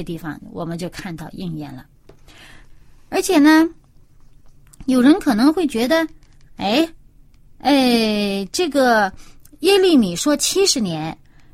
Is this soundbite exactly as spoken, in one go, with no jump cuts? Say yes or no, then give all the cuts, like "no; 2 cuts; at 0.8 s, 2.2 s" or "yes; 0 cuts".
yes; 0 cuts